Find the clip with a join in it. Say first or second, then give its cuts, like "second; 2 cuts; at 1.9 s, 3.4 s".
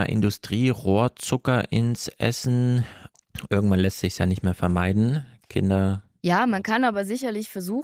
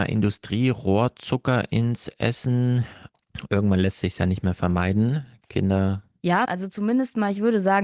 second; 1 cut; at 6.5 s